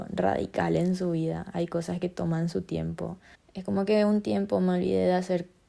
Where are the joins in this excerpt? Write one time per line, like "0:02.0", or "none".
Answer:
0:03.3